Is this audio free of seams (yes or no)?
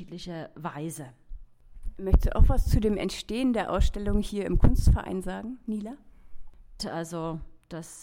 no